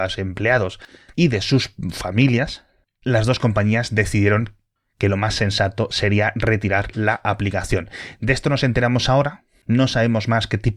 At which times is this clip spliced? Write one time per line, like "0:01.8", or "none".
0:01.1